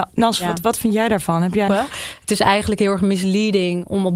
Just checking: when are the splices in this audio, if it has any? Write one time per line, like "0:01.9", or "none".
0:01.7